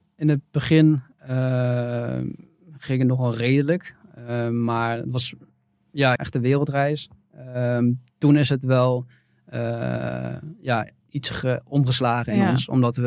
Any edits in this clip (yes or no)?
yes